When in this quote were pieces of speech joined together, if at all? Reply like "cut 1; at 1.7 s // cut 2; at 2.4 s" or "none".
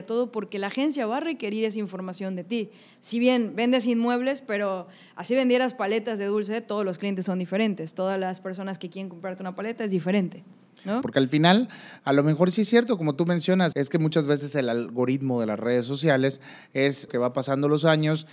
cut 1; at 11.0 s // cut 2; at 13.7 s // cut 3; at 17.1 s